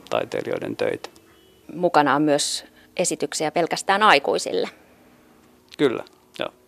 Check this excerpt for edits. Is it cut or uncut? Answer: uncut